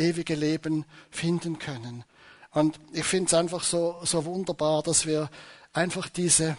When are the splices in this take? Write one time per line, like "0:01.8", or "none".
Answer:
none